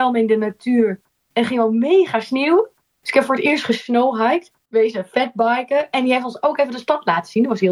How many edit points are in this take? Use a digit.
1